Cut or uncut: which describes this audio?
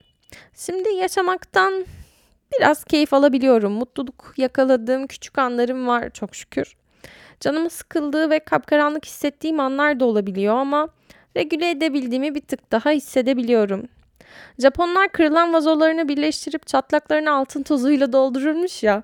uncut